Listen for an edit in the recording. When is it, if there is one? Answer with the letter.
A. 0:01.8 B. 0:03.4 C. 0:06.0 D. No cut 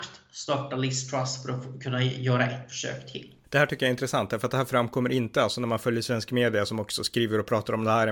B